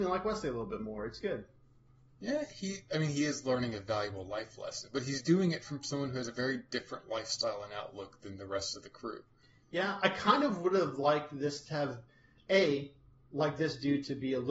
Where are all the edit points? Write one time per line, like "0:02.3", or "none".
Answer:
none